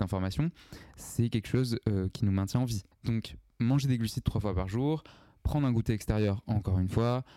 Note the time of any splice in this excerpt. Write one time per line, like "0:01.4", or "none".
0:02.9